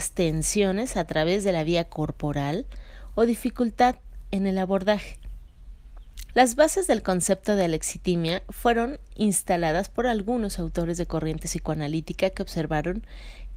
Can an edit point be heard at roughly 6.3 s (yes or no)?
yes